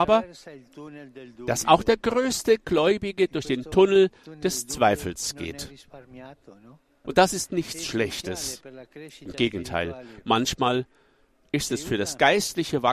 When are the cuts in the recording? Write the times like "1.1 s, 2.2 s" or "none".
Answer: 7.0 s